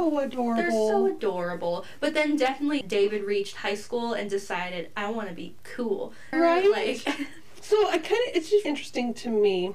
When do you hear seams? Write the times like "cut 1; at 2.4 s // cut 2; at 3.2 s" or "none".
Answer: cut 1; at 2.8 s // cut 2; at 6.3 s // cut 3; at 8.6 s